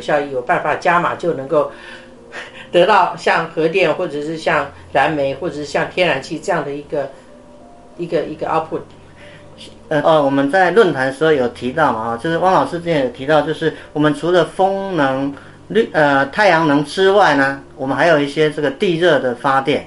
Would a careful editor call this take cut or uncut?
cut